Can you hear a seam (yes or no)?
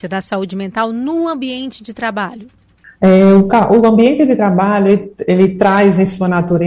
yes